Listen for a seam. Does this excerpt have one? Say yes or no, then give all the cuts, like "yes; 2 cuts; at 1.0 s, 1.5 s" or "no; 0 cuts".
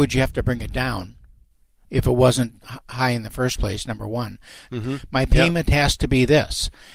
yes; 1 cut; at 4.7 s